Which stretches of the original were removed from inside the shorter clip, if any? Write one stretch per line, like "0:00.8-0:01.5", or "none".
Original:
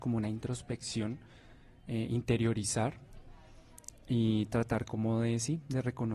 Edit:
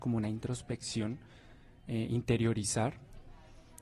none